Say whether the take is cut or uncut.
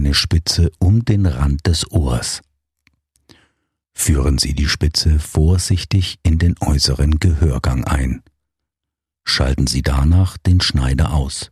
uncut